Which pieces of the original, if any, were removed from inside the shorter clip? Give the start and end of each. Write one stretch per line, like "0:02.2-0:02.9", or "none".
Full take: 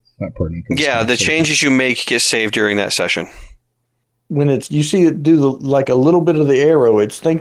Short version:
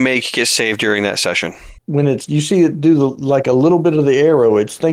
0:03.5-0:04.2